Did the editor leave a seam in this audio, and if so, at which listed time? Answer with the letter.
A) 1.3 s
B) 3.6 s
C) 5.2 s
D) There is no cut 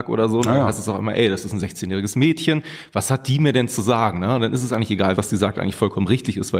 C